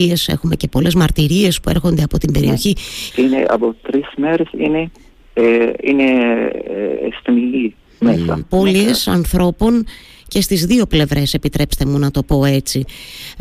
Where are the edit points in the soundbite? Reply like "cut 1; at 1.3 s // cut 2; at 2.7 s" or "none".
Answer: cut 1; at 3.1 s // cut 2; at 8.4 s